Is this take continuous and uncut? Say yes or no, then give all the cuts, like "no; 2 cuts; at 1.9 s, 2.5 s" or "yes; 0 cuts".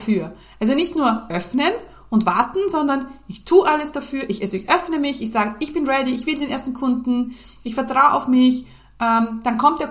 yes; 0 cuts